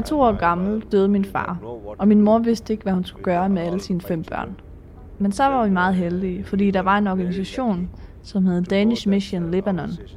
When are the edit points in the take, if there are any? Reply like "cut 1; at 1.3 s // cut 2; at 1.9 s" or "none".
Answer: none